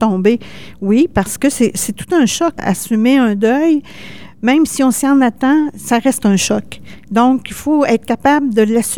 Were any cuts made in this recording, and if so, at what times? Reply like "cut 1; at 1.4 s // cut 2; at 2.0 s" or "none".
cut 1; at 2.6 s